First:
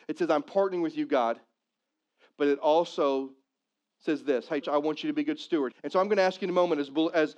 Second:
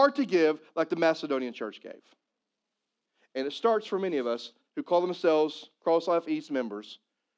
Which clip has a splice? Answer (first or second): first